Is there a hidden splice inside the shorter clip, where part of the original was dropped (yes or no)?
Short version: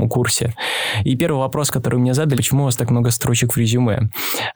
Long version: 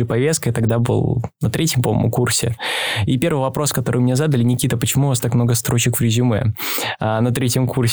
yes